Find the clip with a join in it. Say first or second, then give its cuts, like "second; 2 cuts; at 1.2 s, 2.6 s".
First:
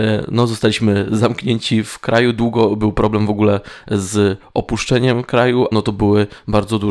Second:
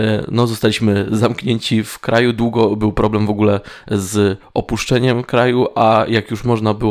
first; 1 cut; at 5.7 s